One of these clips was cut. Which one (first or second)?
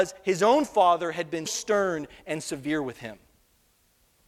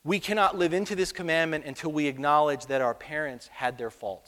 first